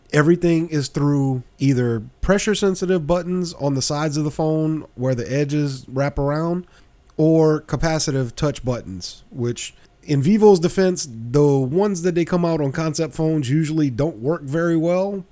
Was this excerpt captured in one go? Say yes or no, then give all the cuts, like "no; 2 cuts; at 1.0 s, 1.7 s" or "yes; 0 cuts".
yes; 0 cuts